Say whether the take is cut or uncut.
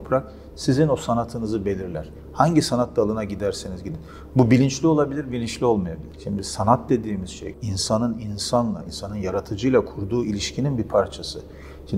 cut